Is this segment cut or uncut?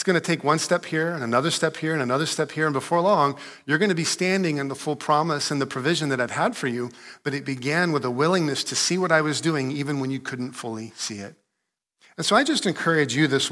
uncut